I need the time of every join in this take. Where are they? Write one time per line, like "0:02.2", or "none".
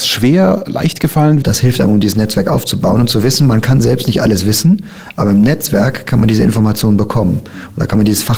0:01.4